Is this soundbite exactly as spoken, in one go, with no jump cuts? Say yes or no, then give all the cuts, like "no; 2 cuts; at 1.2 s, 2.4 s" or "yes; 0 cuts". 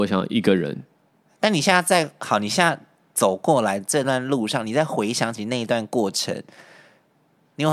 yes; 0 cuts